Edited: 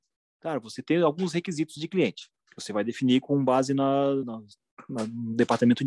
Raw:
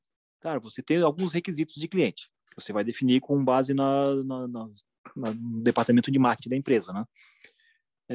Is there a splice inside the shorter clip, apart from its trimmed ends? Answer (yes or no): yes